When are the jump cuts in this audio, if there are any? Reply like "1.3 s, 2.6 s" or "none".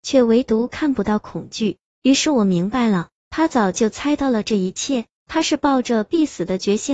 none